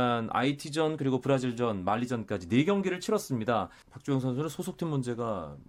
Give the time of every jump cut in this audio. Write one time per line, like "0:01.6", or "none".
0:01.0
0:03.8